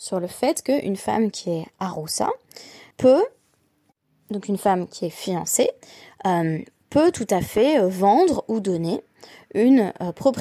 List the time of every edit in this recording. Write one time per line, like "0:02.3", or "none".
0:02.9